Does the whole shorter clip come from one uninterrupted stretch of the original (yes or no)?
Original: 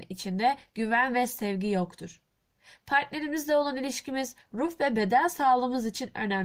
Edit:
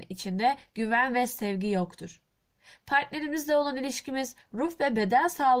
yes